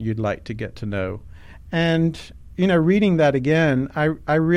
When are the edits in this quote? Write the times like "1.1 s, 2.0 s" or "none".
none